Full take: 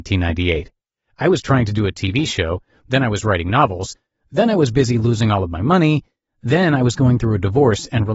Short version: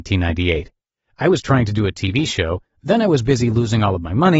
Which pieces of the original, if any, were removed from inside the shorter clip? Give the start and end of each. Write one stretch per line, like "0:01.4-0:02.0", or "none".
0:02.7-0:04.1

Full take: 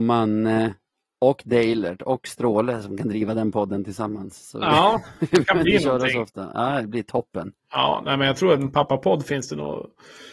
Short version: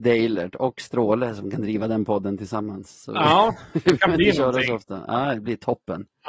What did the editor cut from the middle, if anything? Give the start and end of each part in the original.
none

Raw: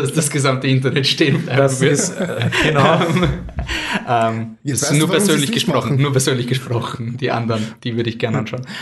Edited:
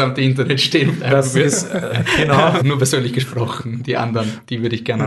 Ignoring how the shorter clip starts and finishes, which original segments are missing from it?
0:03.1-0:05.9

